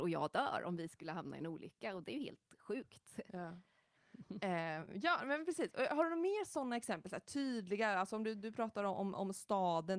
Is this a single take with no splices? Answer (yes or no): yes